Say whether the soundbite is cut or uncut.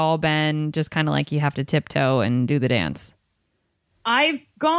uncut